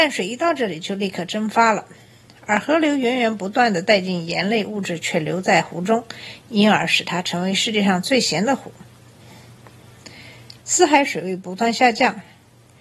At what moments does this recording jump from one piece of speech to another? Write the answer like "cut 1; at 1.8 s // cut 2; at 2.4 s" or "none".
cut 1; at 10.6 s

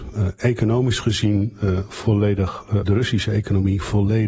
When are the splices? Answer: cut 1; at 2.8 s

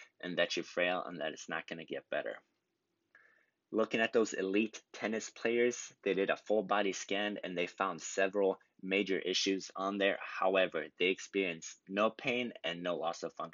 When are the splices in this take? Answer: none

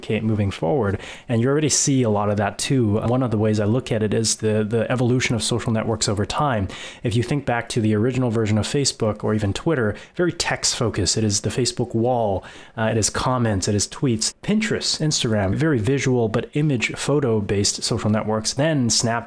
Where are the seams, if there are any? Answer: cut 1; at 14.3 s

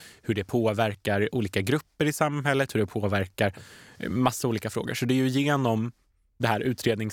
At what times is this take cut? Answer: cut 1; at 2.7 s

